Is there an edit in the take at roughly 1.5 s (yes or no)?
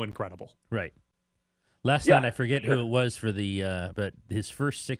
no